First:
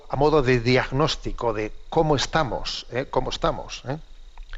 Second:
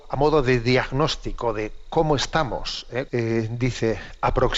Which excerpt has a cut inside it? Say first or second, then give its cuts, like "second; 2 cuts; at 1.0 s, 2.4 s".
second; 1 cut; at 3.1 s